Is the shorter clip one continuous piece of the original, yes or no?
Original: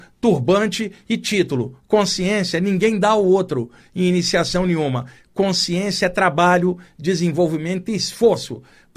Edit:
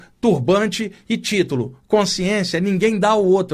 yes